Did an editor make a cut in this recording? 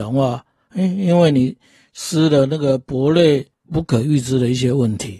yes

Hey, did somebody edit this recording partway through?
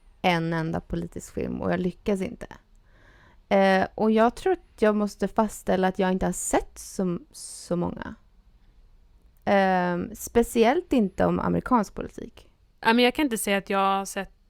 no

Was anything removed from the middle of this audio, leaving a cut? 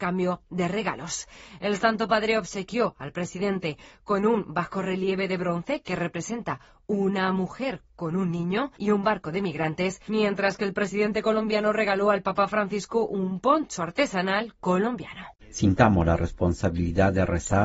yes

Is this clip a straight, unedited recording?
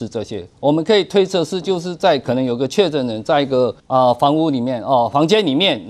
no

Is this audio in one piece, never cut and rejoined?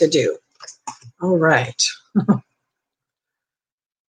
yes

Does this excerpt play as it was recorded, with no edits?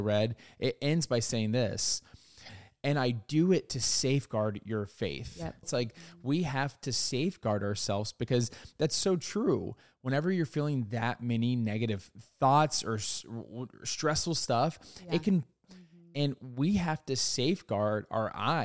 no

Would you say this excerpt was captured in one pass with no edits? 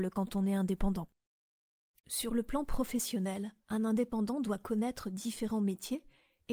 no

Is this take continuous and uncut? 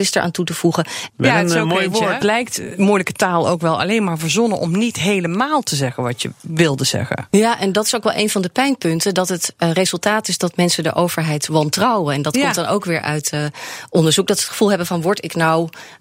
no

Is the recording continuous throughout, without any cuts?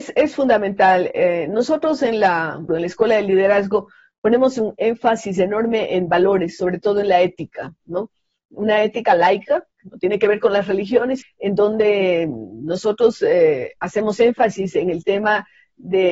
no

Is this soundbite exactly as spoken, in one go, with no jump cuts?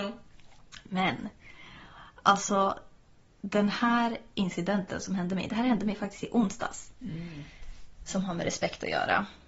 yes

